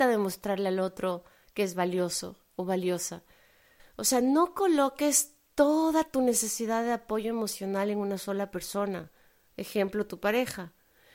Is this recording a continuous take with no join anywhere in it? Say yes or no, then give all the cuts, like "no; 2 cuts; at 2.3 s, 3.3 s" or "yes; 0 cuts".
no; 1 cut; at 3.8 s